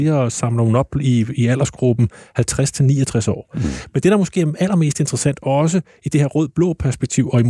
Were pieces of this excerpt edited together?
no; 0 cuts

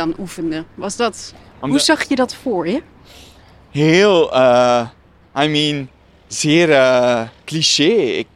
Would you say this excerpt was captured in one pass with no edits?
yes; 0 cuts

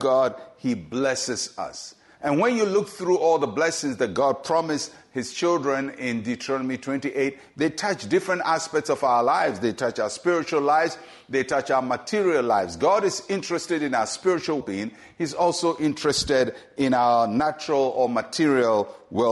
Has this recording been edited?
yes; 1 cut; at 14.6 s

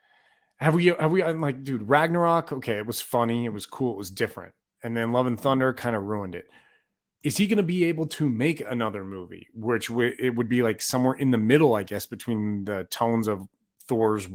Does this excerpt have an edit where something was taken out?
no; 0 cuts

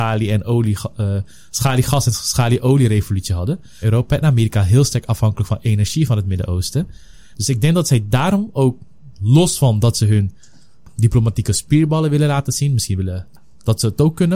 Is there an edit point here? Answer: yes; 2 cuts; at 3.8 s, 7.3 s

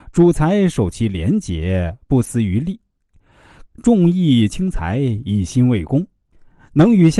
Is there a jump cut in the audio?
yes; 1 cut; at 3.7 s

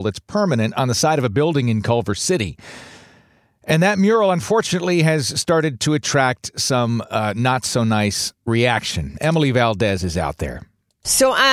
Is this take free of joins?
yes; 0 cuts

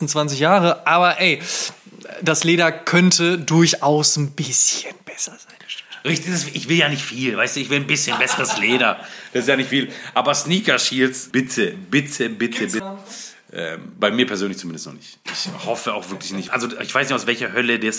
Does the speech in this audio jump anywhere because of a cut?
yes; 3 cuts; at 11.3 s, 12.8 s, 16.5 s

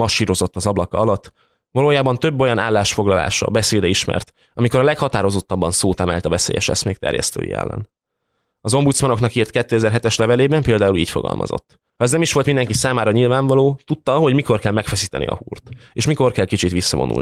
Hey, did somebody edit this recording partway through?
yes; 1 cut; at 11.9 s

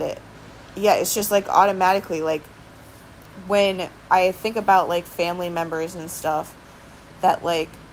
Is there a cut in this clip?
no; 0 cuts

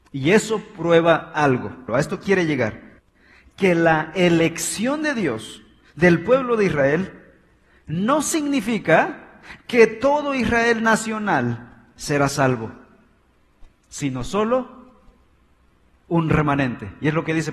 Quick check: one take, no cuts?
no; 1 cut; at 1.9 s

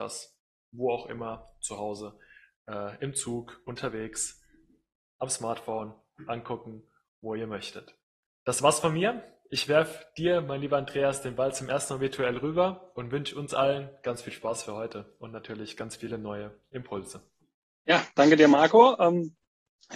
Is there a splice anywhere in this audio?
no; 0 cuts

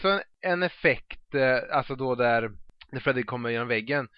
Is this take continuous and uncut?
yes; 0 cuts

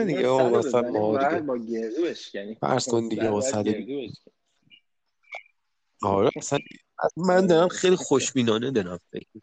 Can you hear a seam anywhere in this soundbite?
yes; 1 cut; at 7.1 s

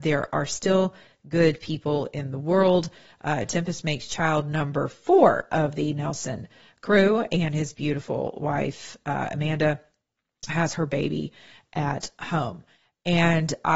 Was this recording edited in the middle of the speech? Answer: yes; 1 cut; at 10.5 s

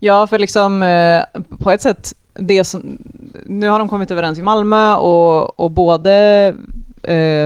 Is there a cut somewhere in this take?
no; 0 cuts

